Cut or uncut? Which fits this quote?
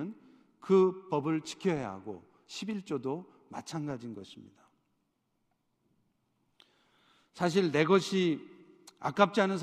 uncut